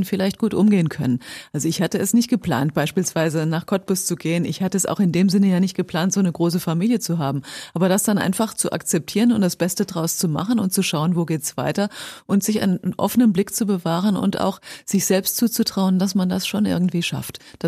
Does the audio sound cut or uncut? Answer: uncut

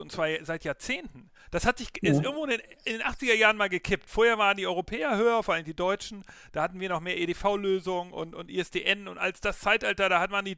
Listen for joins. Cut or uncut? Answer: uncut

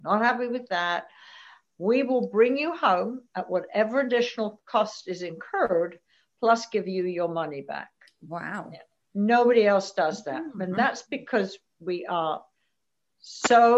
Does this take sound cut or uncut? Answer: uncut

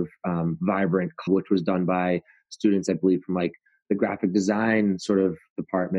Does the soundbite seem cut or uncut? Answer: cut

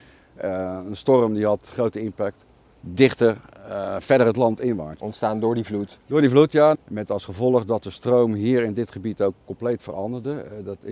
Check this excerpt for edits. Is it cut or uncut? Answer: cut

